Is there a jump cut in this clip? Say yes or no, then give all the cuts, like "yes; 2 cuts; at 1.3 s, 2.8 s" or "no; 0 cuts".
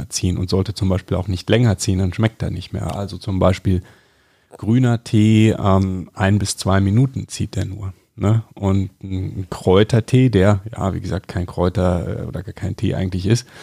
no; 0 cuts